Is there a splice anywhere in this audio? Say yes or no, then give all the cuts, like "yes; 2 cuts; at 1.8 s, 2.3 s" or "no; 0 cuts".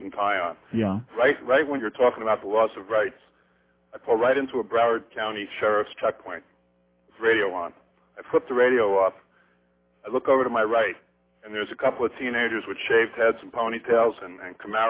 yes; 1 cut; at 1.8 s